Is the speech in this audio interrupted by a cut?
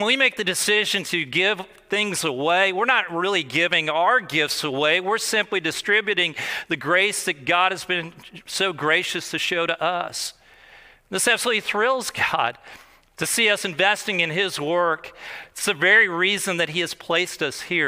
no; 0 cuts

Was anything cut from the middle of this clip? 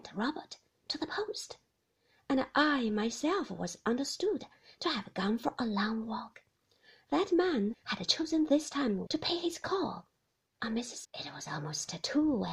yes; 3 cuts; at 7.7 s, 9.1 s, 11.0 s

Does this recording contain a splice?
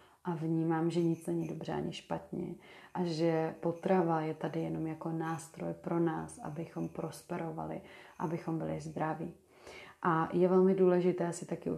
no; 0 cuts

